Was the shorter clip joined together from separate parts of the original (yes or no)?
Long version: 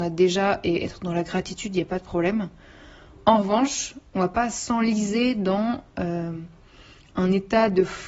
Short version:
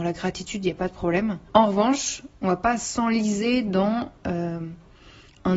yes